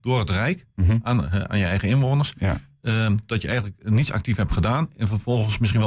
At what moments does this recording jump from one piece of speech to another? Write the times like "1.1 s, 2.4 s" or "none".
none